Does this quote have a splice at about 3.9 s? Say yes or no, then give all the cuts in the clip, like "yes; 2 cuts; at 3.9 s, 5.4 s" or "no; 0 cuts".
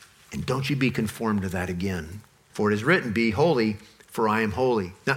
no; 1 cut; at 2.5 s